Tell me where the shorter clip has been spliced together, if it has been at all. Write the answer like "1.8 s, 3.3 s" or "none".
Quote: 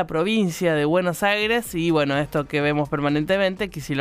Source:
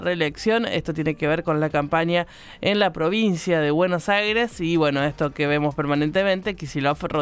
none